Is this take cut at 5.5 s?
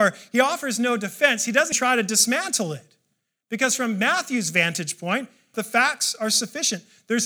yes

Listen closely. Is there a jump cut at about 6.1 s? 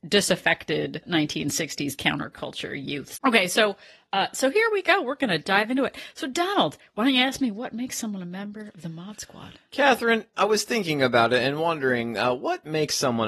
no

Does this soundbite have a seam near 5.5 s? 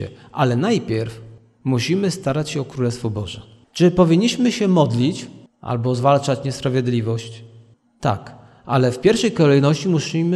yes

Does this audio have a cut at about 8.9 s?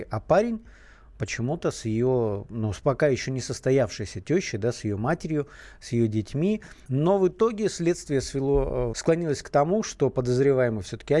yes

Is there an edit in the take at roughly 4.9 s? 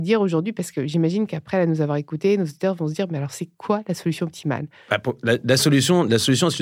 no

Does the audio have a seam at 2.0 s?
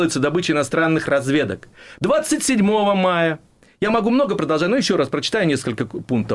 yes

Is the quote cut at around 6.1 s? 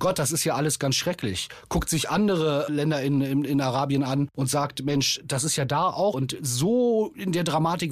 yes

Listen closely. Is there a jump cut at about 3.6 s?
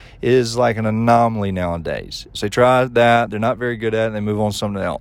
no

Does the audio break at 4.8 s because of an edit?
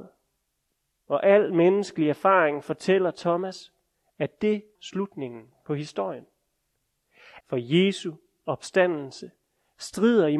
yes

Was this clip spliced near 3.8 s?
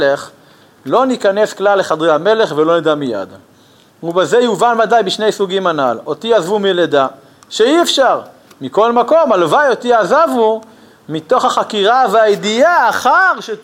no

